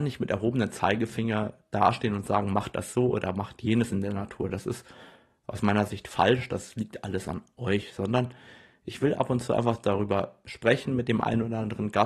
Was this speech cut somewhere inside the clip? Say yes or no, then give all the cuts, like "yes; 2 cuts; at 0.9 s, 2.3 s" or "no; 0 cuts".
no; 0 cuts